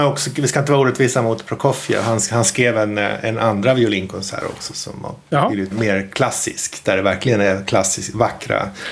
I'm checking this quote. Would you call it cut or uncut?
cut